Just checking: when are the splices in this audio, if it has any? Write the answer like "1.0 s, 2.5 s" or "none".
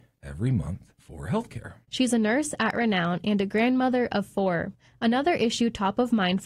1.9 s